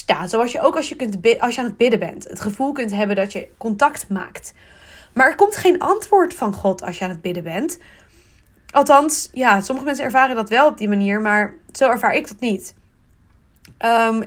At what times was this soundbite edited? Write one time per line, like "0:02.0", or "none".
none